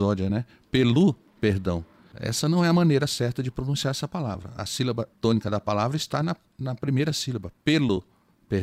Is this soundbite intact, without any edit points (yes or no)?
yes